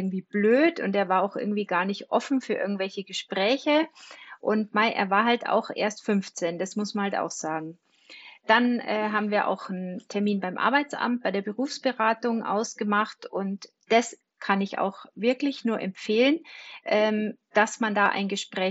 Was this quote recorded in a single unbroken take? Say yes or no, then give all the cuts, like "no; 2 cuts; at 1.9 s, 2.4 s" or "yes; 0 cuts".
yes; 0 cuts